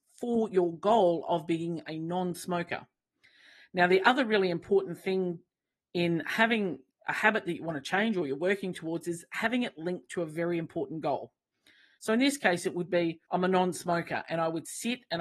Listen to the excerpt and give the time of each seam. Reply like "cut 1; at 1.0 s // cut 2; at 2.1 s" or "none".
cut 1; at 12.0 s // cut 2; at 13.2 s